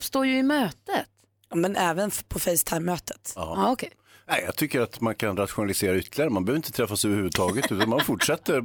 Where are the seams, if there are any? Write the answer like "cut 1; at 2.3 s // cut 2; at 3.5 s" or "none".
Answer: none